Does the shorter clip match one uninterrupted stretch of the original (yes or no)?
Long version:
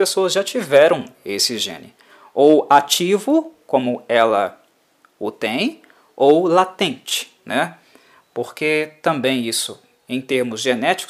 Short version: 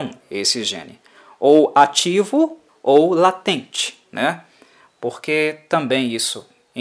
no